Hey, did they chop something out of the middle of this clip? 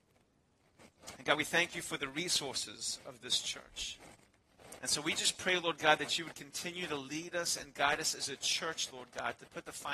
yes; 1 cut; at 4.8 s

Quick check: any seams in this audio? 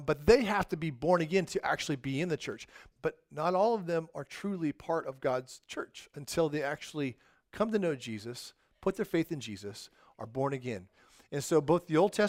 yes; 1 cut; at 2.9 s

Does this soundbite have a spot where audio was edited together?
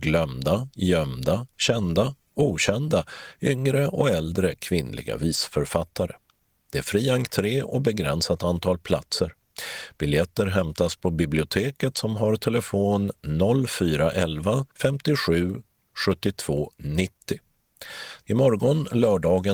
yes; 2 cuts; at 14.7 s, 18.2 s

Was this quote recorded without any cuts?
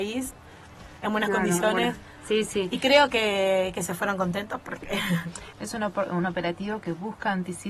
no; 1 cut; at 5.5 s

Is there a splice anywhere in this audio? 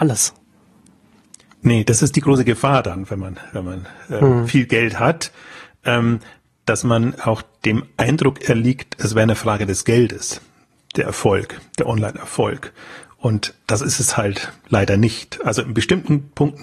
no; 0 cuts

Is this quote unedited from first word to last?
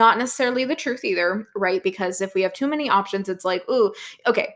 no; 1 cut; at 1.8 s

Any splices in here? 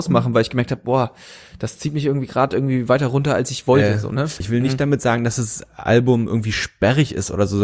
yes; 1 cut; at 4.4 s

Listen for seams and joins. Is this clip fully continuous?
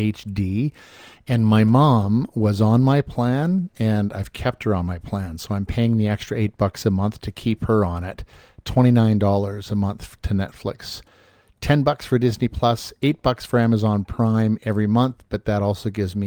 yes; 0 cuts

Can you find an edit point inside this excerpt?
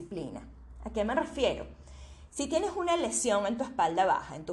no; 0 cuts

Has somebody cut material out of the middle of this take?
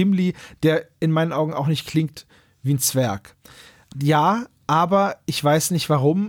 yes; 1 cut; at 3.9 s

